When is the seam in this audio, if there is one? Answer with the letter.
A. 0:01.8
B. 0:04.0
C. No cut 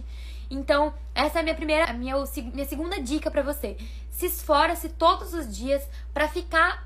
A